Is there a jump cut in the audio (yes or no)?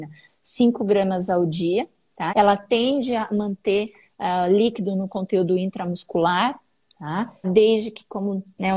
yes